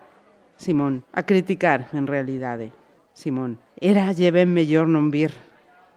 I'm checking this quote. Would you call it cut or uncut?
cut